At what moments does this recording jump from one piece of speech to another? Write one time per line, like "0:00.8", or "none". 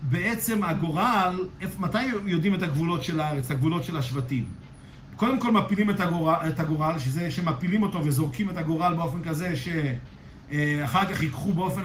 none

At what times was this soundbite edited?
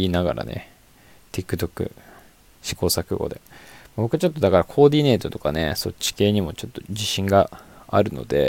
none

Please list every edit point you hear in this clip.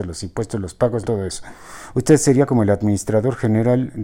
0:01.0

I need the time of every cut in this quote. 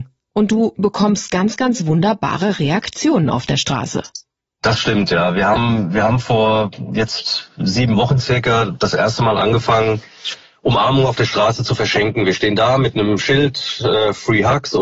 none

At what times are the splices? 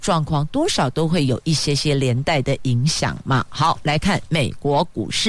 none

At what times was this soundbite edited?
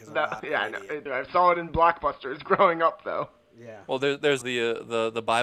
0:01.1
0:04.4

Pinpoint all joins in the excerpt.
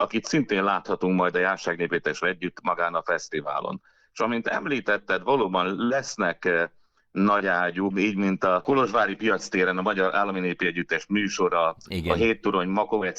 0:07.9

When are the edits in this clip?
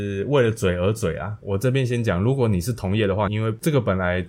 0:01.4
0:03.3

